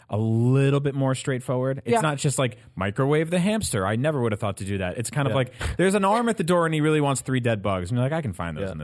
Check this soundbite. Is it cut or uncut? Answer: uncut